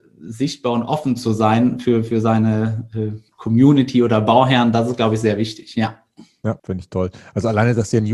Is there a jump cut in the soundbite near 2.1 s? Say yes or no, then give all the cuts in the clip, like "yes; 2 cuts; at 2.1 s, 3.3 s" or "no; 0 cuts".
no; 1 cut; at 6.6 s